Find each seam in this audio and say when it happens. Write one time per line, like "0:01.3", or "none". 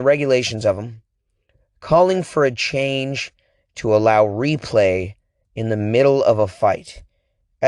none